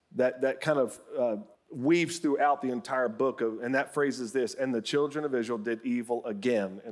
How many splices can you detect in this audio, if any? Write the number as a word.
one